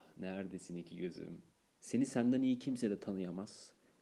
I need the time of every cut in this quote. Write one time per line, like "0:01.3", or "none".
0:01.7